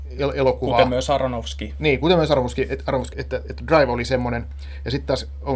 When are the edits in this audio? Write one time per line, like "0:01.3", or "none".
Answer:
0:03.1

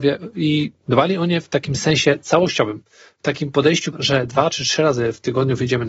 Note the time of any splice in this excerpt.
0:03.9

